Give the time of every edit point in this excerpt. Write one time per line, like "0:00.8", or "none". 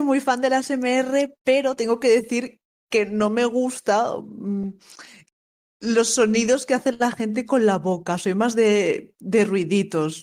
none